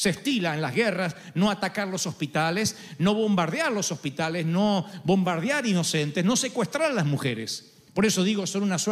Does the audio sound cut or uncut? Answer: uncut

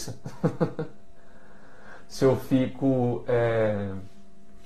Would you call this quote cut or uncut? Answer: uncut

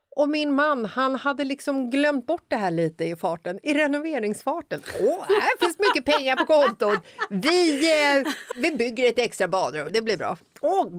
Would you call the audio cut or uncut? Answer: cut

